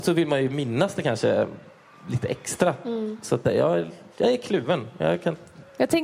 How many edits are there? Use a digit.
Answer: 1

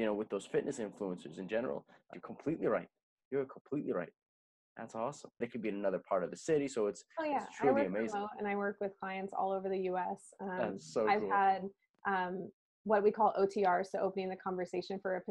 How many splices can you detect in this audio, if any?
2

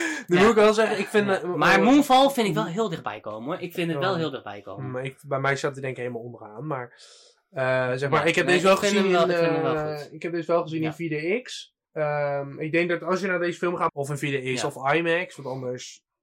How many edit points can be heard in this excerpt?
2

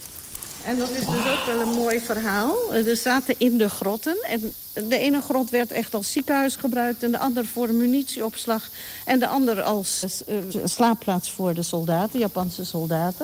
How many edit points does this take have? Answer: 1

